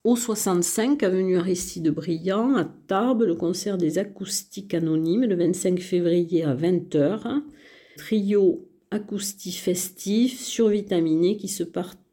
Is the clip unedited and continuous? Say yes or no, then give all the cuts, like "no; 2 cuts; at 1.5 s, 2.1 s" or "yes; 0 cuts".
no; 1 cut; at 8.0 s